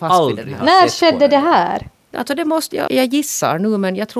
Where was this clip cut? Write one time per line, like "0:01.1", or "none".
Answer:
0:02.9